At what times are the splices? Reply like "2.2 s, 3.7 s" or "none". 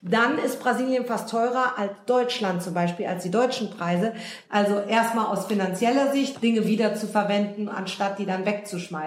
4.4 s, 6.3 s